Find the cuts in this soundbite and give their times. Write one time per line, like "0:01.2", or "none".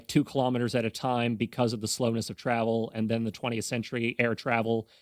none